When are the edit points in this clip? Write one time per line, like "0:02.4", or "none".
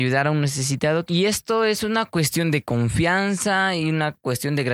0:01.1